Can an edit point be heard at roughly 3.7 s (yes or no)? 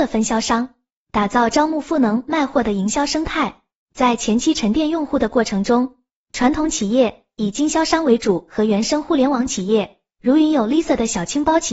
no